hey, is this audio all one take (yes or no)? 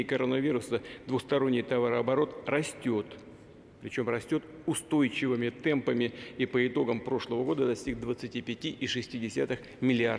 yes